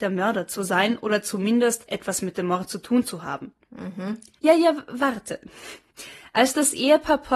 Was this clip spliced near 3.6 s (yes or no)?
yes